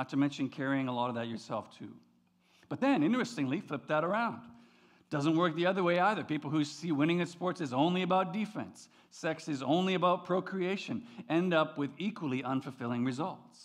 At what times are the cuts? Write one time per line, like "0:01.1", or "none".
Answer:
none